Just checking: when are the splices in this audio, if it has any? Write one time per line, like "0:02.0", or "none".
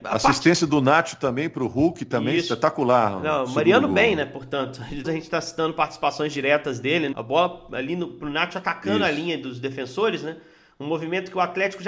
0:05.0
0:07.1